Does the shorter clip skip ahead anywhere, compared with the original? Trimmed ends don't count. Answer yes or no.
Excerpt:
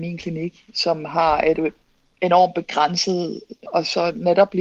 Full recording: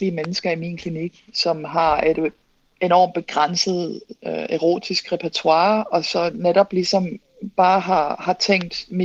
yes